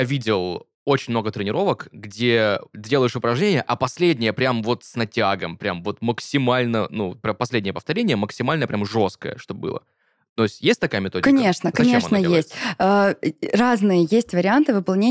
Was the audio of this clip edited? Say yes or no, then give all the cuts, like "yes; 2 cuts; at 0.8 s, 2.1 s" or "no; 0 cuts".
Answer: no; 0 cuts